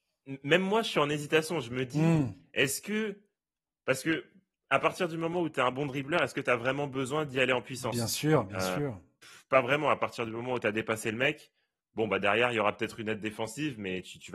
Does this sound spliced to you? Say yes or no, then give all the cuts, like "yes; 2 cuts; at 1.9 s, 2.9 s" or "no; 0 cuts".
no; 0 cuts